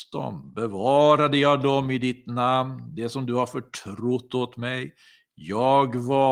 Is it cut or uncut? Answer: uncut